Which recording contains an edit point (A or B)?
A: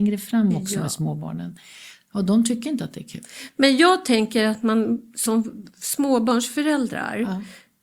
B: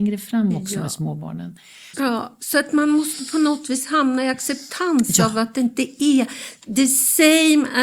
B